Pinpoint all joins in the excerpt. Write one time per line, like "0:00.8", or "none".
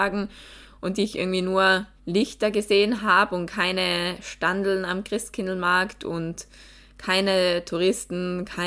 0:02.0

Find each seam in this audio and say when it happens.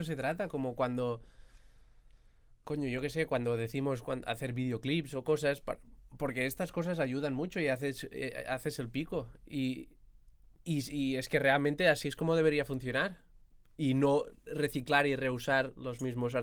none

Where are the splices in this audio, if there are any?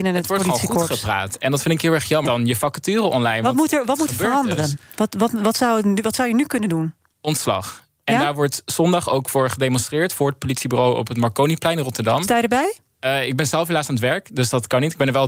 0:02.3

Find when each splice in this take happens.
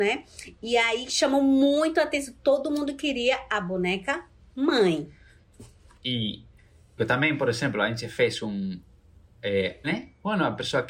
0:07.0
0:09.8

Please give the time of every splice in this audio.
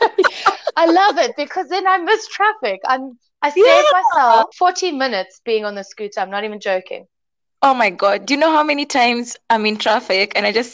0:04.5

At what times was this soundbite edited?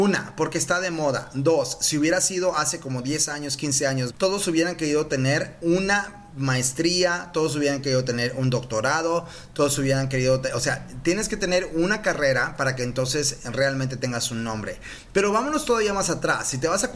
0:04.1

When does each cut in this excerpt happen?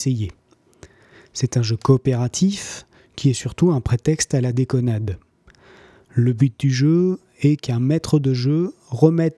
none

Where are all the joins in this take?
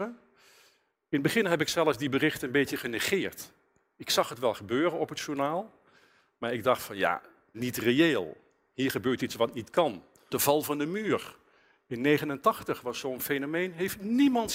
0:07.5
0:10.3

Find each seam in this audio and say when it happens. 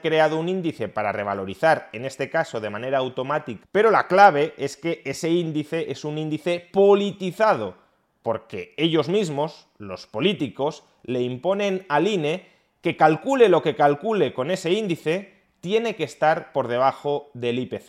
0:03.6

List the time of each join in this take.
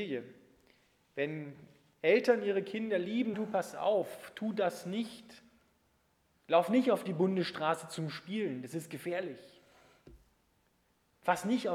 0:03.3

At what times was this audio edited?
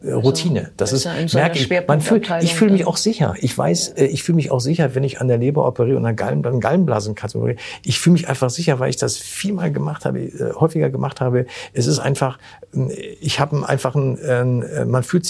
none

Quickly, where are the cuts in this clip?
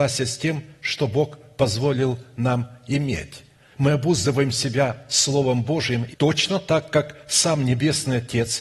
0:03.7
0:06.1

